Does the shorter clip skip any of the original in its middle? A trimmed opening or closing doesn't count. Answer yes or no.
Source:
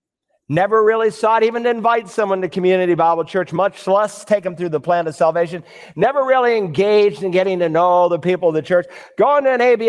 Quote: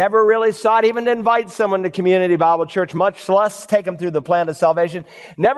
no